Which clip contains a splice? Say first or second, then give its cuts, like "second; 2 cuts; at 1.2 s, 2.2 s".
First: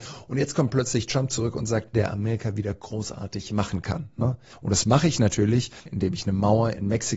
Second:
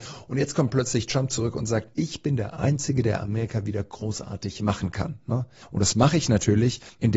first; 2 cuts; at 1.9 s, 5.9 s